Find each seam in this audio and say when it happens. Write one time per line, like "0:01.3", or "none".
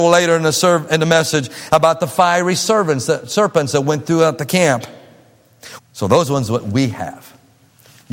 0:05.8